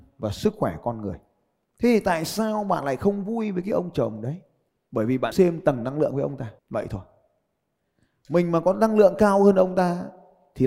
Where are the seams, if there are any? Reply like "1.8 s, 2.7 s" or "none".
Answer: 5.3 s, 6.6 s